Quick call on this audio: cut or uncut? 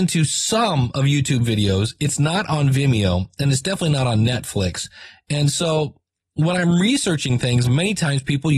uncut